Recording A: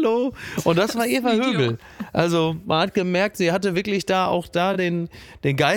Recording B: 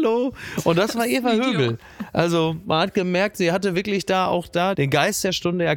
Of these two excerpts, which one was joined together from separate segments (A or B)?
B